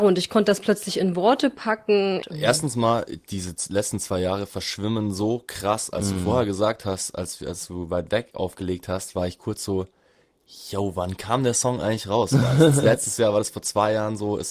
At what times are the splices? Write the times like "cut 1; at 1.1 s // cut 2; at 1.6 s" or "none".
cut 1; at 2.2 s